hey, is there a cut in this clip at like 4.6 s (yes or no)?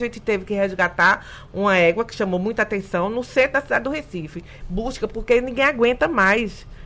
yes